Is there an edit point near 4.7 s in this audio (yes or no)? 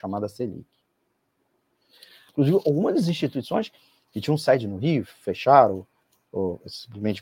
no